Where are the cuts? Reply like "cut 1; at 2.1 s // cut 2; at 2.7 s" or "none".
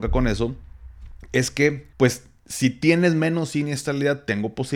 cut 1; at 1.9 s